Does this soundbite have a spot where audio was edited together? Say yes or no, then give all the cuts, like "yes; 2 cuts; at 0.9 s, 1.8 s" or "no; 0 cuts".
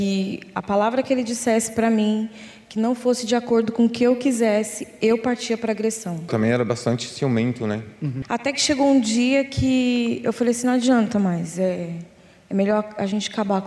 no; 0 cuts